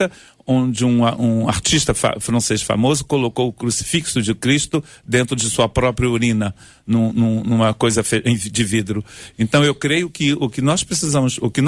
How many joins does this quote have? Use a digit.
1